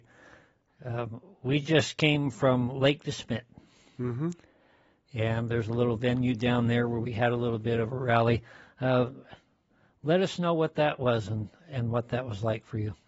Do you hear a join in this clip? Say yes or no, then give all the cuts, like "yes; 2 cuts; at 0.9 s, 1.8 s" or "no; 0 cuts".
no; 0 cuts